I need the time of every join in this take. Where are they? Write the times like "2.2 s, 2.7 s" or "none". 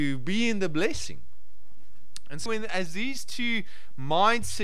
2.5 s